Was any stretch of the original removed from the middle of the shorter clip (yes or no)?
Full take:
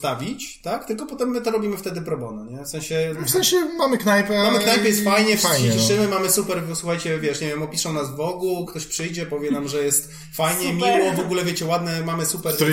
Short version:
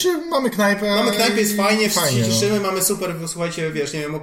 no